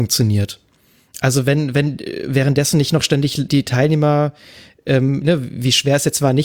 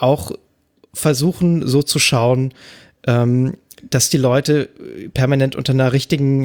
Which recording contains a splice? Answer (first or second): first